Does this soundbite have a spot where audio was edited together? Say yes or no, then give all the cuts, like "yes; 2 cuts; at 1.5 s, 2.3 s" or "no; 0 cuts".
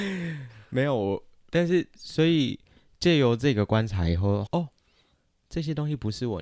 yes; 2 cuts; at 1.9 s, 4.5 s